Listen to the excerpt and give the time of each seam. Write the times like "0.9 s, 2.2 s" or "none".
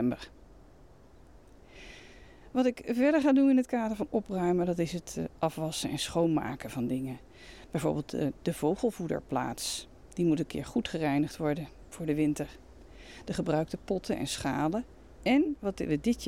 none